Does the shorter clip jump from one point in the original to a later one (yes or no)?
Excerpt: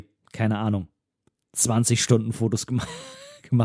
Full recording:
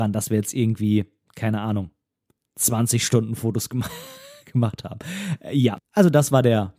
no